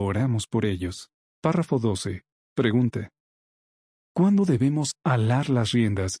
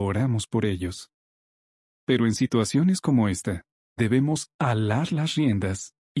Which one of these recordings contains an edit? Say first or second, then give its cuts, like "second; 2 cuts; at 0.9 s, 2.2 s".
first; 1 cut; at 1.3 s